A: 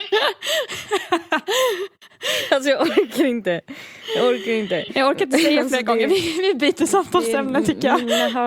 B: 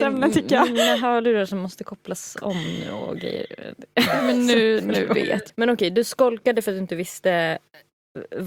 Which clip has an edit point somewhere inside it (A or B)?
B